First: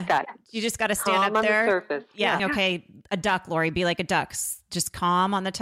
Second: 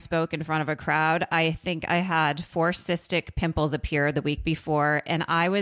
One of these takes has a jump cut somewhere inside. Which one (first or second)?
first